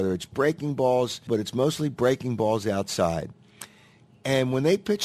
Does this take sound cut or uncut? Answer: cut